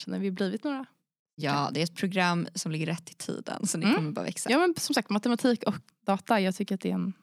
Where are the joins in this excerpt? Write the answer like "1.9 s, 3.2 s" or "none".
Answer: 5.9 s